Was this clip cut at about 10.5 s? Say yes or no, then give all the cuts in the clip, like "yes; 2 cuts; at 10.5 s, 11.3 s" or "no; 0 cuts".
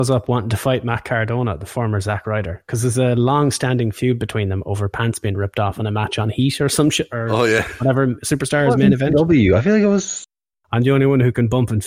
yes; 1 cut; at 10.5 s